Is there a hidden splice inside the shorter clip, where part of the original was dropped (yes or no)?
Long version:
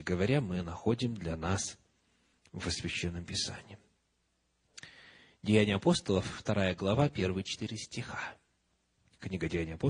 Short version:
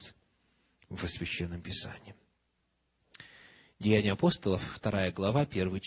no